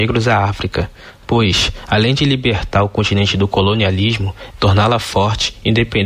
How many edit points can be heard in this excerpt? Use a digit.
1